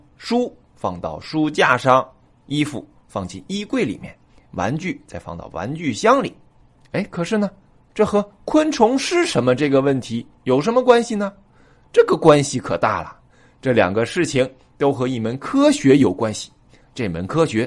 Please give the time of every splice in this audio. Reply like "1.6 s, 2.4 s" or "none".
2.3 s, 6.8 s